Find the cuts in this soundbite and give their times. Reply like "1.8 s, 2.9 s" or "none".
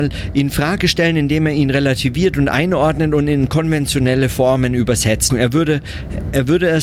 5.3 s